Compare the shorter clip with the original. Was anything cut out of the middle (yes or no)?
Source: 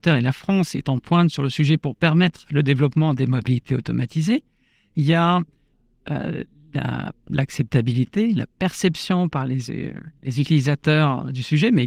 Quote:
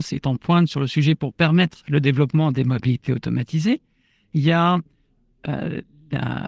no